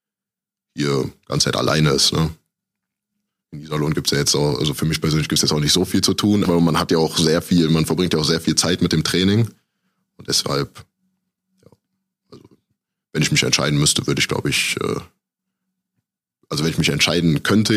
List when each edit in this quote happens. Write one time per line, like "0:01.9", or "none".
0:06.5